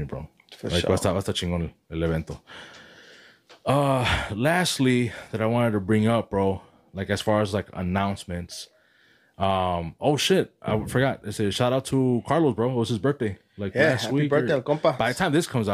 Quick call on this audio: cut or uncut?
uncut